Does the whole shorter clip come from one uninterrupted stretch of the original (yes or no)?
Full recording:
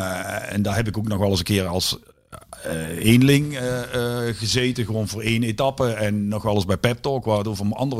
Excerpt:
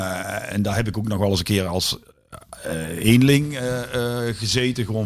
yes